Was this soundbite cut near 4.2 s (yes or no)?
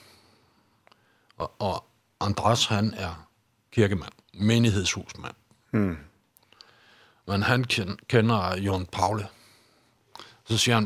yes